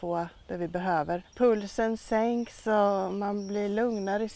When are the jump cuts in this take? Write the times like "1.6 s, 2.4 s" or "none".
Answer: 1.2 s